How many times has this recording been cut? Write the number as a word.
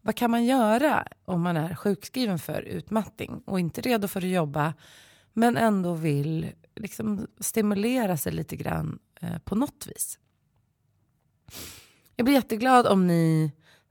zero